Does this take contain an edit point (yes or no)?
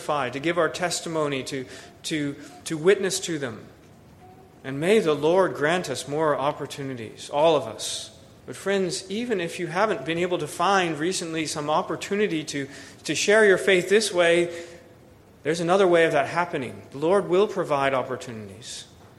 yes